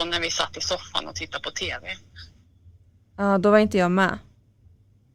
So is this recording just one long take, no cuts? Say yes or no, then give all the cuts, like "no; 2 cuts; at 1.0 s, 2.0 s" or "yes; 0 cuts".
yes; 0 cuts